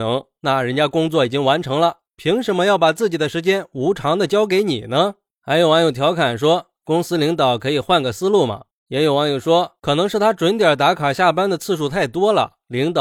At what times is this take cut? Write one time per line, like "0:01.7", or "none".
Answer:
0:08.7